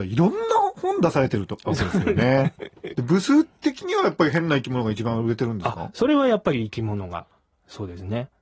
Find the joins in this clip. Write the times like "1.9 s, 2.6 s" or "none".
2.9 s